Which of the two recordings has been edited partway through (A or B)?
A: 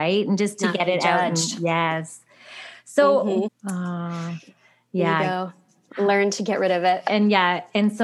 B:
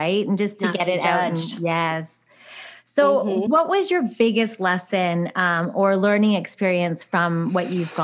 A